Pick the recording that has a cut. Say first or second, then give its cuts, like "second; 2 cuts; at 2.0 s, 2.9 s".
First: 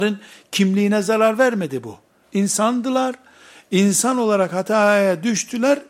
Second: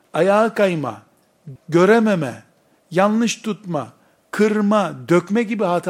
second; 1 cut; at 1.6 s